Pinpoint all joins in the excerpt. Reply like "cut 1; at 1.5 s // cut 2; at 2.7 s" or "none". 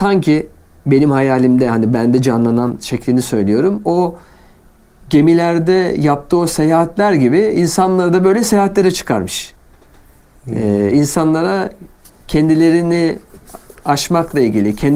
none